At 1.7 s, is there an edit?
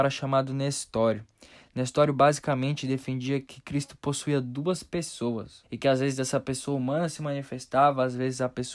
no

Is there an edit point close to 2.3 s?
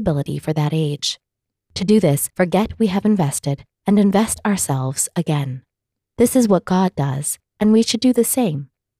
yes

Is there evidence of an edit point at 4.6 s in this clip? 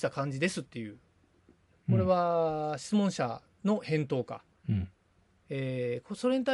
yes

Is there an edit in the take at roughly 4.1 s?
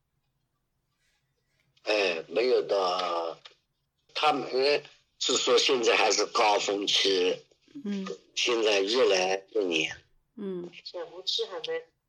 yes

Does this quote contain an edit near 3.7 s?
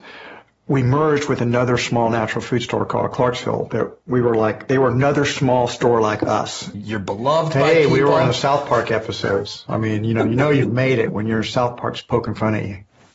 no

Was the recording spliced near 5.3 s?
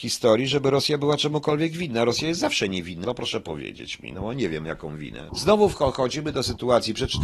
yes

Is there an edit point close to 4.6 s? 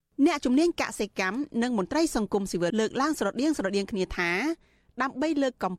no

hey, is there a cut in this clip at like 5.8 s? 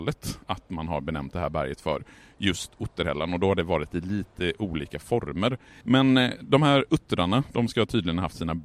yes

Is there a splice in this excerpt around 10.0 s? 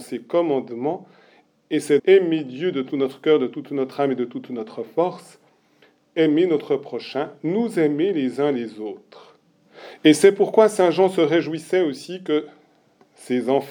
yes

